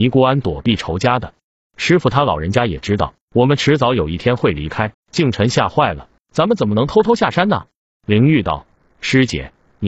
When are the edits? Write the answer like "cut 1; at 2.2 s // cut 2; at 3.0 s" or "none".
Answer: cut 1; at 4.9 s // cut 2; at 6.2 s